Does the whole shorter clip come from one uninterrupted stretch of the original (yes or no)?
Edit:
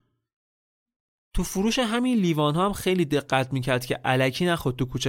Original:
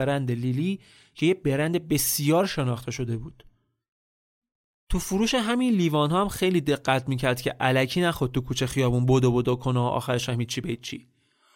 yes